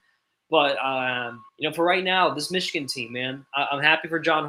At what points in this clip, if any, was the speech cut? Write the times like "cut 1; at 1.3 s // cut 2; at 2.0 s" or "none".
cut 1; at 1.5 s